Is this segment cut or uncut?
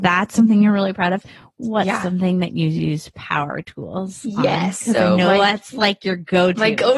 uncut